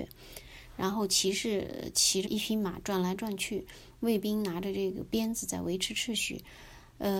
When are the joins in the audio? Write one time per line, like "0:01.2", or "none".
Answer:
0:02.3